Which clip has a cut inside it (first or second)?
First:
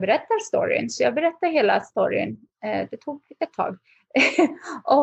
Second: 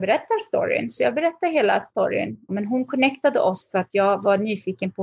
second